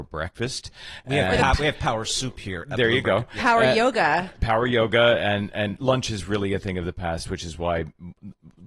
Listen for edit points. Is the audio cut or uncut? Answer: uncut